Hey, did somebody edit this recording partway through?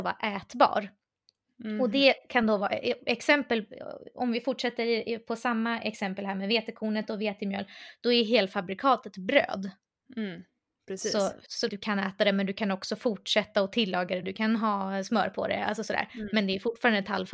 yes; 2 cuts; at 11.7 s, 14.2 s

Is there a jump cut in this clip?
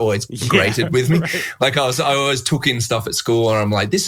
no; 0 cuts

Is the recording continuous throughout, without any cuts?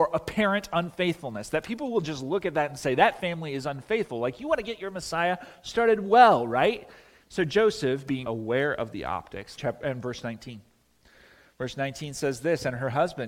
no; 3 cuts; at 7.2 s, 8.2 s, 9.6 s

